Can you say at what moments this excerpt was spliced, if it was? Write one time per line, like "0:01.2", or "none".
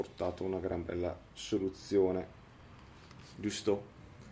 none

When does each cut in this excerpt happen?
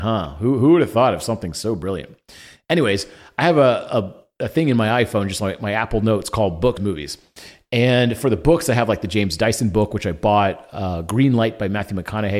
0:06.8

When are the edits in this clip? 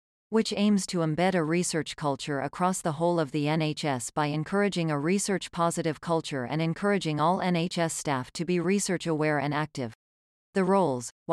0:10.3

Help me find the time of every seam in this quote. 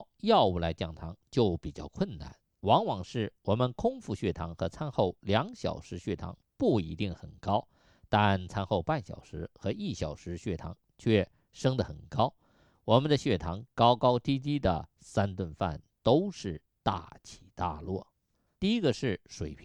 0:18.5

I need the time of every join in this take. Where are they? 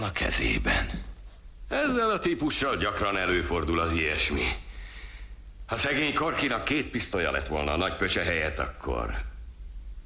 none

